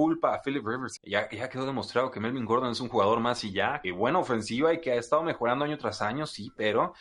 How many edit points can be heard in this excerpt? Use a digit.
2